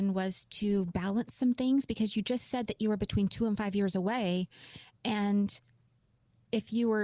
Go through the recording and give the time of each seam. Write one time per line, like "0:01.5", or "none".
none